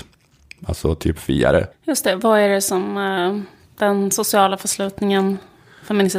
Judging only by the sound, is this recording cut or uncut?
cut